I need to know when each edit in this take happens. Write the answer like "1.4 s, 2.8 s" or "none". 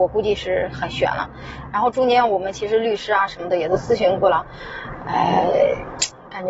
none